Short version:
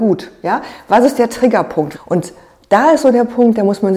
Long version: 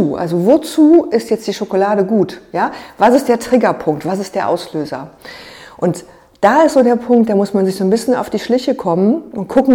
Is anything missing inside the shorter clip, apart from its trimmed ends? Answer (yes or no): yes